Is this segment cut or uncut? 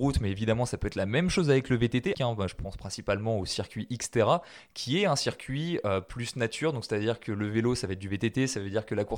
cut